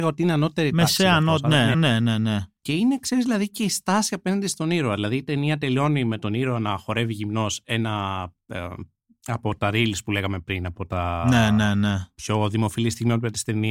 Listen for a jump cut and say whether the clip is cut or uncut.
cut